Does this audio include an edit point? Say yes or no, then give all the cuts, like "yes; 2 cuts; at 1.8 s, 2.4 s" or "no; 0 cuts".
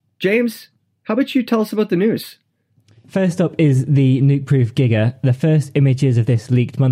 no; 0 cuts